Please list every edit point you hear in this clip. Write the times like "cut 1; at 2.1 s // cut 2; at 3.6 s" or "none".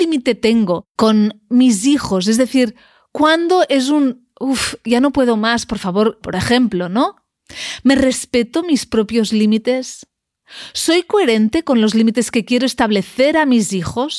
cut 1; at 6.2 s